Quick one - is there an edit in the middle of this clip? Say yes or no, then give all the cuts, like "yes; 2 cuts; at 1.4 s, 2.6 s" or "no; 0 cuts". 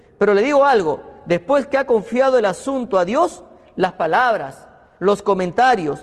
no; 0 cuts